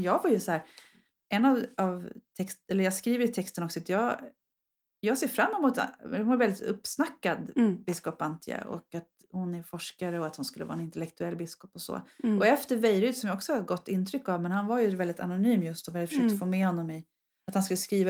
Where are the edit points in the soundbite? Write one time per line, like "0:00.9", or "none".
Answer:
0:09.2